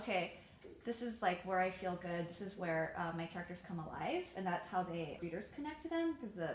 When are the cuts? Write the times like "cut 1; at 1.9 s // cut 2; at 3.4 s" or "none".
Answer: cut 1; at 5.2 s